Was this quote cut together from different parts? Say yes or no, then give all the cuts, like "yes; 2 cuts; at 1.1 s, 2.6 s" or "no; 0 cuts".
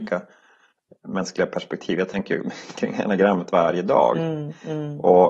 no; 0 cuts